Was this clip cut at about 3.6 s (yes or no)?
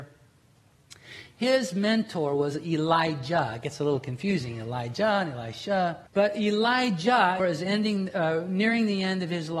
no